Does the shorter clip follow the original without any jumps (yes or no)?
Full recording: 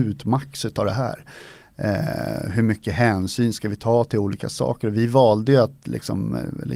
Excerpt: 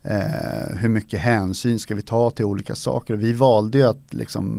yes